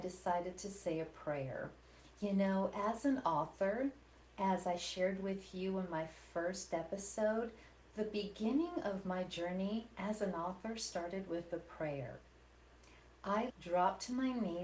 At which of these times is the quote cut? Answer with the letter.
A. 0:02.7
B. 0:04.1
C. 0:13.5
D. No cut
C